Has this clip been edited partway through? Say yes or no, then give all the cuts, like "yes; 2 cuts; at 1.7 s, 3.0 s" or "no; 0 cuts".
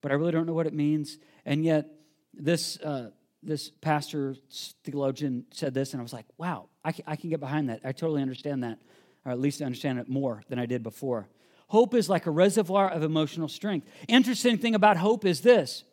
no; 0 cuts